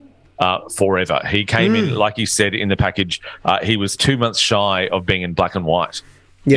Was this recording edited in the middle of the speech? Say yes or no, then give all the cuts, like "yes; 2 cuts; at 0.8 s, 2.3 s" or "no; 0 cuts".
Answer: no; 0 cuts